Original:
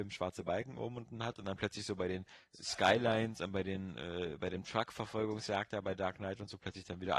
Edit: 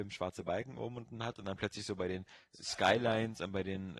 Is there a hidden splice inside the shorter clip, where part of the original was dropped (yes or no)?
no